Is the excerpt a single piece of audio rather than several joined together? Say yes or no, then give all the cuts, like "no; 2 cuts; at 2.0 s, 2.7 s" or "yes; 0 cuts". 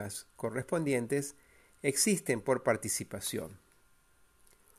yes; 0 cuts